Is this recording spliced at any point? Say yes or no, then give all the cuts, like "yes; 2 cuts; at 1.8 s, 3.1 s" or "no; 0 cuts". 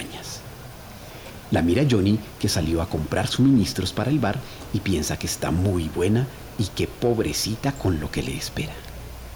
no; 0 cuts